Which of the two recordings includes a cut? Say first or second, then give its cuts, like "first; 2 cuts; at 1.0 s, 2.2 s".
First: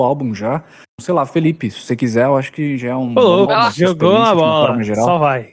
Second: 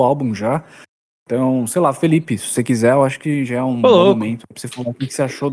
first; 2 cuts; at 1.0 s, 3.5 s